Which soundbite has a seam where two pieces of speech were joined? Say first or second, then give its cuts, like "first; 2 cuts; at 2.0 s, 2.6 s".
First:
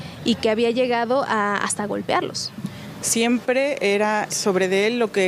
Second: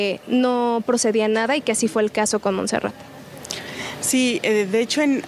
first; 2 cuts; at 3.0 s, 4.3 s